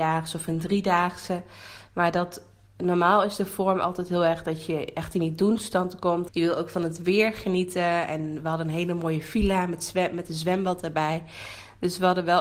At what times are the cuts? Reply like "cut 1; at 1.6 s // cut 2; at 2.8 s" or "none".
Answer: cut 1; at 6.3 s